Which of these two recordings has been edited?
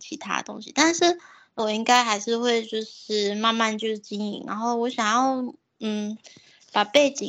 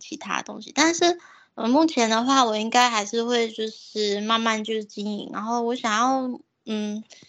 first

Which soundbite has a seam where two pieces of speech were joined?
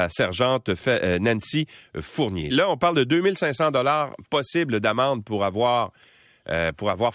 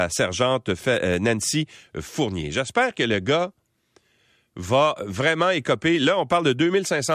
first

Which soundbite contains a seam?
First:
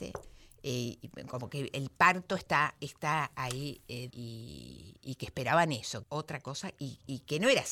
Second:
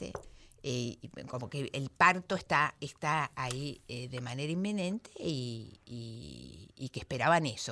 first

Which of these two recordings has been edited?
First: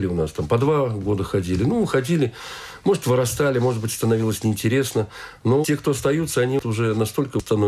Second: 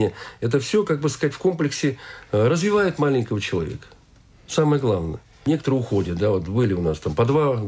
first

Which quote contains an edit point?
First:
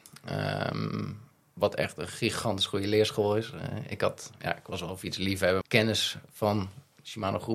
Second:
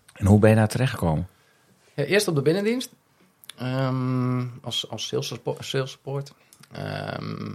first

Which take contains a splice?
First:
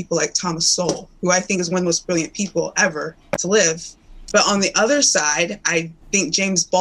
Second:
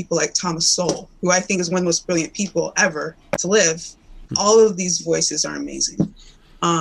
second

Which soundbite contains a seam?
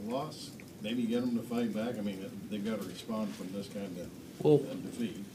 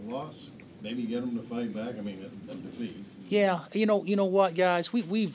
second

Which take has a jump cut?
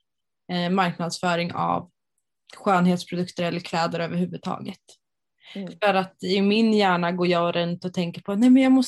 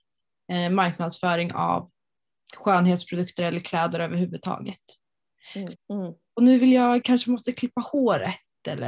second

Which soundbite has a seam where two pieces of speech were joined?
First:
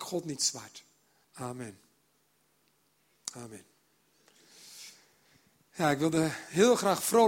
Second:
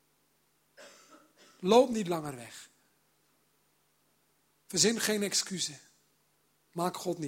first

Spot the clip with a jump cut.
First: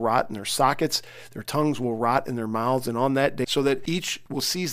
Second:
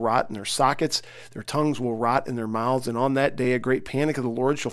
first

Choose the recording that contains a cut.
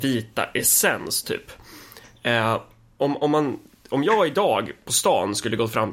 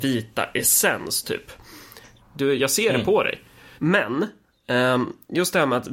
second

